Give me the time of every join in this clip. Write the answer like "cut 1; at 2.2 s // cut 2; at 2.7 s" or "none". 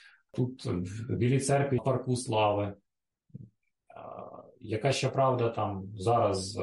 cut 1; at 1.8 s